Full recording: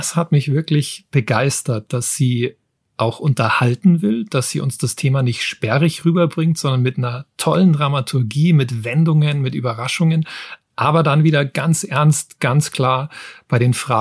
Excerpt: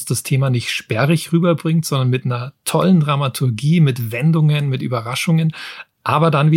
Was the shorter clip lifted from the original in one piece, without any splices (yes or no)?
yes